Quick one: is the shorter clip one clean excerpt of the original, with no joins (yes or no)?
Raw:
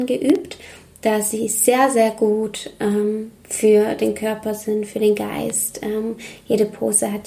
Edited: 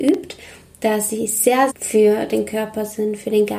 no